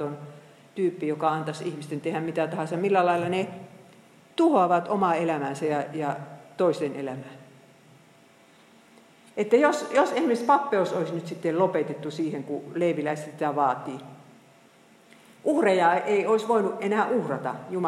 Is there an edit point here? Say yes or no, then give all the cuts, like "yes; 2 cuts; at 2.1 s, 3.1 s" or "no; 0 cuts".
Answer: no; 0 cuts